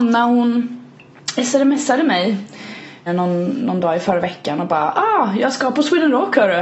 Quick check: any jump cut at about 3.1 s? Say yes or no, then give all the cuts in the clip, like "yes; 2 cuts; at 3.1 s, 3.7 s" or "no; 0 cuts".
yes; 1 cut; at 3.1 s